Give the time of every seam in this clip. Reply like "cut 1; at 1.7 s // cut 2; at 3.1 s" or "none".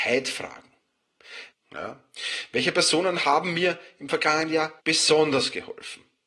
cut 1; at 1.5 s // cut 2; at 4.8 s